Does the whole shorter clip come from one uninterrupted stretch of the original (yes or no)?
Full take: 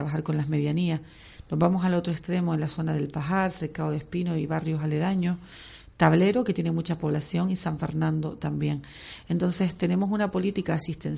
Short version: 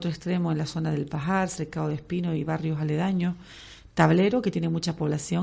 yes